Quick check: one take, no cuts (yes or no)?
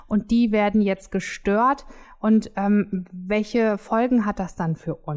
yes